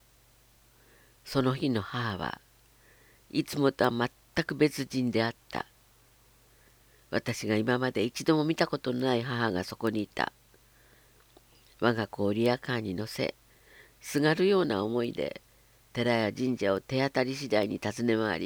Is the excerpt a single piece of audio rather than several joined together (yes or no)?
yes